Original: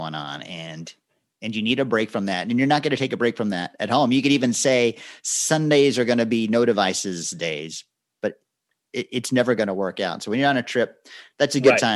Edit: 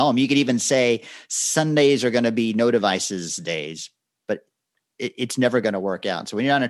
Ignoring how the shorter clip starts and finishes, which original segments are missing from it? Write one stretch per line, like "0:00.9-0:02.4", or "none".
none

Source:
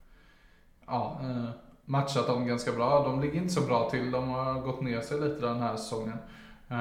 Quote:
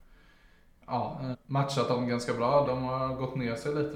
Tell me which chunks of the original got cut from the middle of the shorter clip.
0:01.3-0:01.7
0:03.0-0:04.1

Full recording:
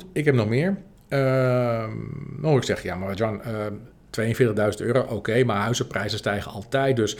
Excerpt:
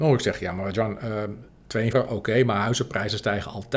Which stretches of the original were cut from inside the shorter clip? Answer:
0:04.4-0:04.9

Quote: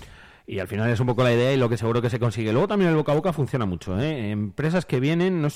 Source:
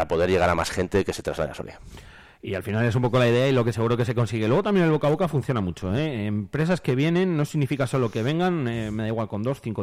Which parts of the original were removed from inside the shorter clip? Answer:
none

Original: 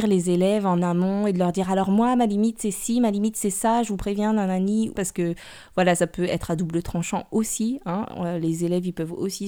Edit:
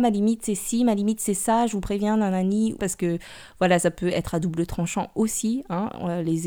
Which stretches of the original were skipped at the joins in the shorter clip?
none

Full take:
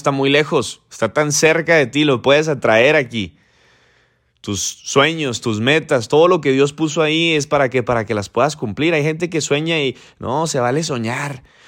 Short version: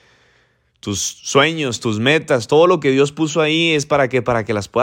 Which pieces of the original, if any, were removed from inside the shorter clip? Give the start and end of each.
none

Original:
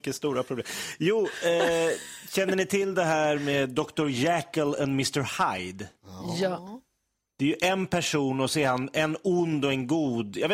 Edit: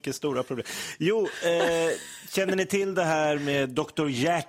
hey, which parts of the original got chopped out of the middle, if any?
none

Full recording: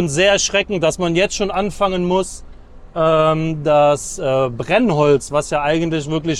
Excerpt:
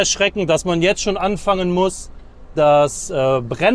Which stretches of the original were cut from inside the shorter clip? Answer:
0:02.9-0:03.6

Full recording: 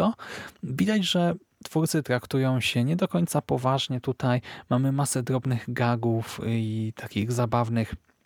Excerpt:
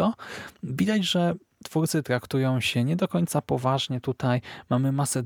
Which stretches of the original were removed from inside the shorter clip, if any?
none

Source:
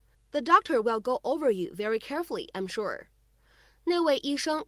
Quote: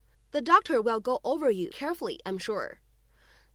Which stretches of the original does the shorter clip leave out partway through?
0:01.7-0:02.0

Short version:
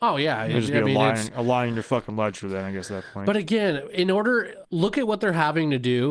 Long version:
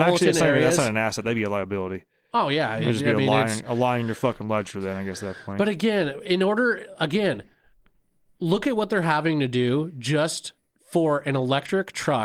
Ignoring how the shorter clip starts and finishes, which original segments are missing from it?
0:07.0-0:08.3

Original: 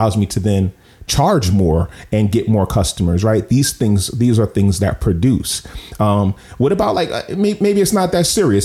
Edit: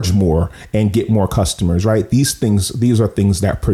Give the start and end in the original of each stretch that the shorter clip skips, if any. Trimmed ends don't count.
none

